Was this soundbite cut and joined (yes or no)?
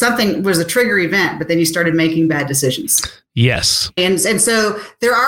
yes